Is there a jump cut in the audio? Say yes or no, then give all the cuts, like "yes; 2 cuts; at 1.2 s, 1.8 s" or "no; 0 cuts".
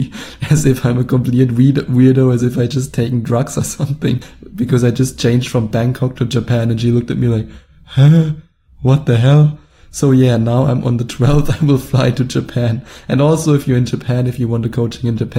no; 0 cuts